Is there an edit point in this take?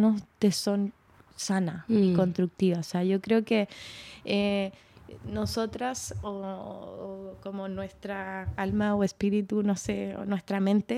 no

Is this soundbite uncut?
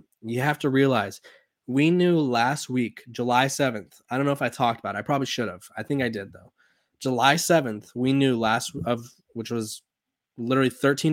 yes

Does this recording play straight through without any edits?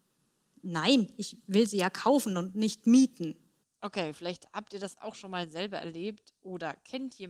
yes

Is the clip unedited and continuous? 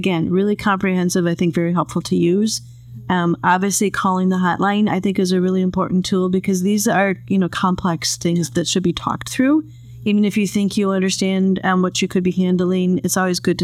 yes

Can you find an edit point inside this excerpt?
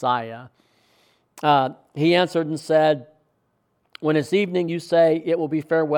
no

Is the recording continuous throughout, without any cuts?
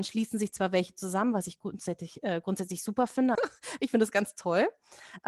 no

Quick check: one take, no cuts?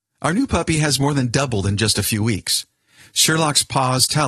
yes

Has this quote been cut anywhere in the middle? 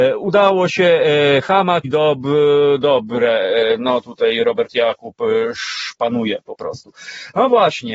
yes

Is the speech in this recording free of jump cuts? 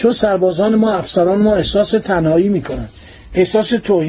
yes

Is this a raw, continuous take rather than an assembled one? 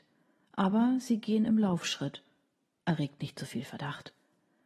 yes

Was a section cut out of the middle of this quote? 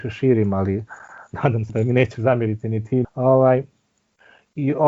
yes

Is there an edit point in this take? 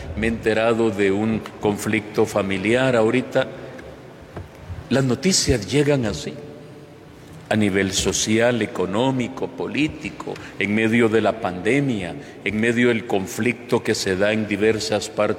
no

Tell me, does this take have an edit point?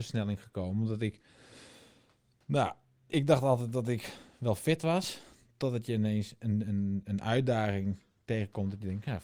yes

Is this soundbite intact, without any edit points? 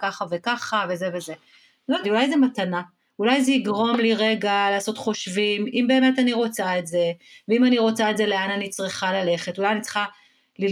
no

